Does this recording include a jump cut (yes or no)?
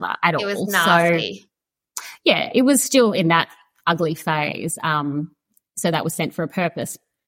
no